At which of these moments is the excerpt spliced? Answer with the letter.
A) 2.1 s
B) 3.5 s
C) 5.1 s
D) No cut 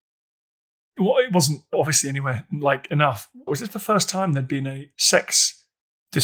B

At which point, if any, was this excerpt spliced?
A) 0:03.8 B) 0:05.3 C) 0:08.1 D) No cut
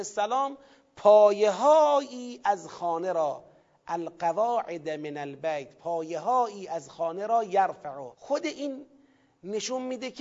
C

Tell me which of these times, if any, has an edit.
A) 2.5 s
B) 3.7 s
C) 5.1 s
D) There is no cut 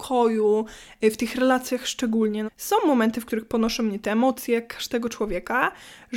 A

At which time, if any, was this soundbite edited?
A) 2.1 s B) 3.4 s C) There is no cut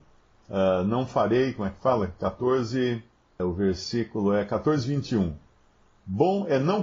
B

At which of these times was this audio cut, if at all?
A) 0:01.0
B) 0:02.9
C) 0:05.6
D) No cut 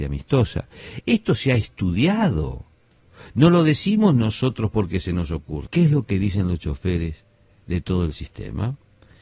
C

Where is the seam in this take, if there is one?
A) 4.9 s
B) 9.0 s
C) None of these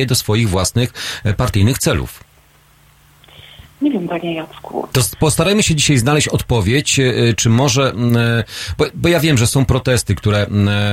A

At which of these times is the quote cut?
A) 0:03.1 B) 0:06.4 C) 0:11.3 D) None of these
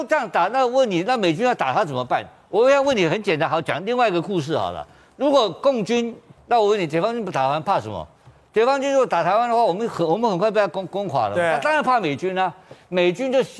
B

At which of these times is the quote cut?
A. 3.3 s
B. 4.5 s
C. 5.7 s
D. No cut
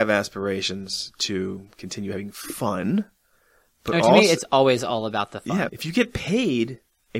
C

